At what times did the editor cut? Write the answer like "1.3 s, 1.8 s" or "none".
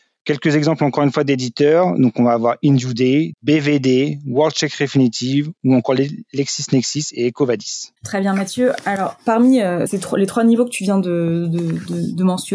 3.3 s, 8.0 s, 9.9 s